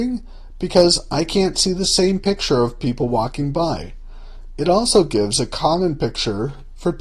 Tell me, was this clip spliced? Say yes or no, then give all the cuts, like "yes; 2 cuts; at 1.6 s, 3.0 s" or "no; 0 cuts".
yes; 1 cut; at 4.6 s